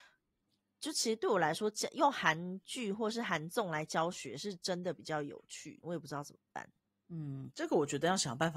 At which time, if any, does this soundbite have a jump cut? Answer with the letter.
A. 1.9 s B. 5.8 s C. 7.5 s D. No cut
B